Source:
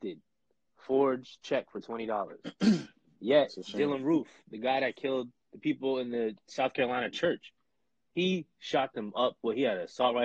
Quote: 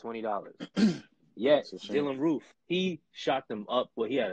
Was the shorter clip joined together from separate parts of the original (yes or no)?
yes